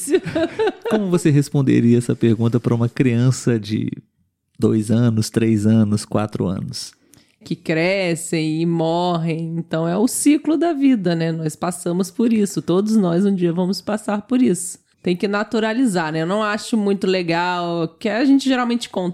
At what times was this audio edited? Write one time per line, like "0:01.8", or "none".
0:07.4
0:14.9